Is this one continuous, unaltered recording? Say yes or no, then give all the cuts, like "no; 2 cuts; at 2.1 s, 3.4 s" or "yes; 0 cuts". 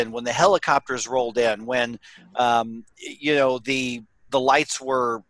yes; 0 cuts